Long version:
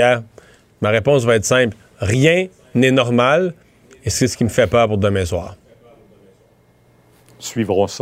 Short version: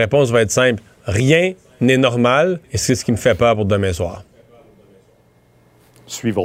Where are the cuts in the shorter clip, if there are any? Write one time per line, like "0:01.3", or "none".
0:02.6